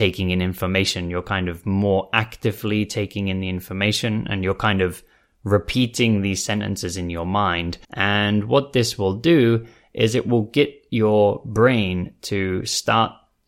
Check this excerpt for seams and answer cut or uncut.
cut